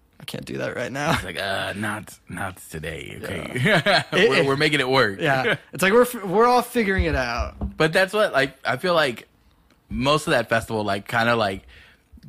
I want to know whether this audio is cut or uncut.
uncut